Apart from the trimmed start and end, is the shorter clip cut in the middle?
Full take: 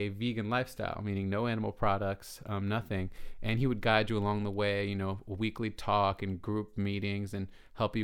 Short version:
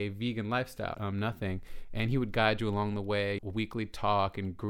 yes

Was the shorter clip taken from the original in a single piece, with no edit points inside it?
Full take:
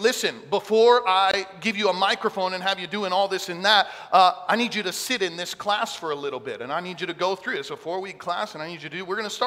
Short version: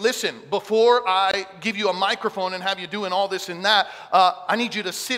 yes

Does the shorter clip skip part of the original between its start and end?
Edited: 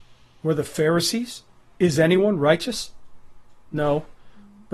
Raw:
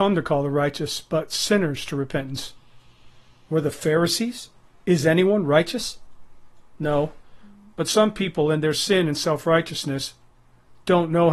no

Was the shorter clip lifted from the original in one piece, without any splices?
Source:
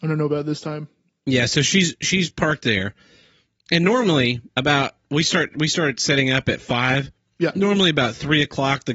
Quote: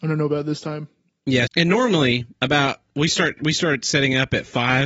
no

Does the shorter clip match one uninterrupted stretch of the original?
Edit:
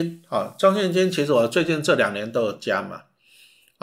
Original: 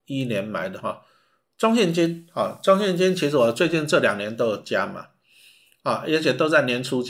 yes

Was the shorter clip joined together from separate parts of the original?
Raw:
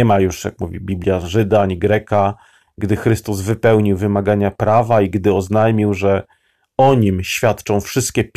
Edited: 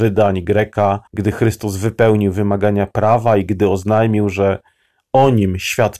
yes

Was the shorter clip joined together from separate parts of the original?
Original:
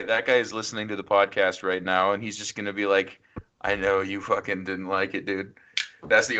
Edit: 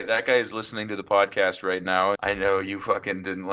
yes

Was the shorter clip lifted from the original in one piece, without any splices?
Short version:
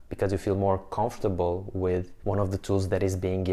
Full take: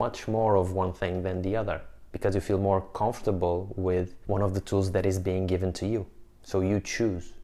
yes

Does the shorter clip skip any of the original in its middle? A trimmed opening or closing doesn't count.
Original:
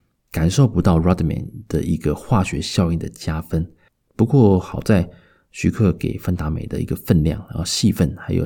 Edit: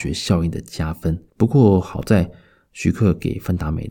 yes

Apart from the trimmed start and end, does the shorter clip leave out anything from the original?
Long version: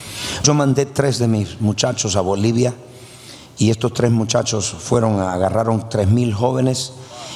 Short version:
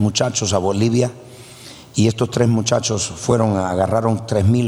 no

